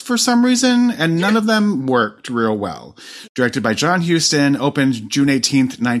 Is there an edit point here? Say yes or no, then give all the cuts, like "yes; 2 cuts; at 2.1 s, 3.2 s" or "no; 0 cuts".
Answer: yes; 1 cut; at 3.3 s